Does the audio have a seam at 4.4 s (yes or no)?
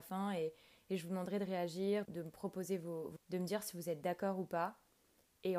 no